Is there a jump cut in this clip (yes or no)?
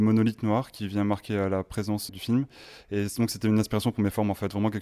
yes